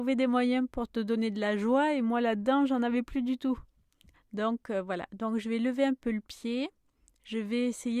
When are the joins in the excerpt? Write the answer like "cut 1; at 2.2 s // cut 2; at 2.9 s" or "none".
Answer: cut 1; at 4.1 s